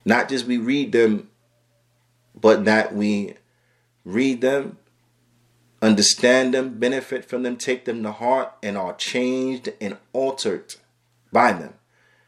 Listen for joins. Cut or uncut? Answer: uncut